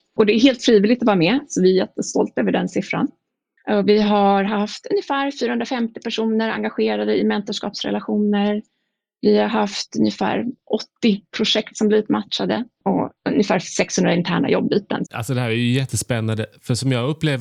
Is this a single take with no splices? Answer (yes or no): no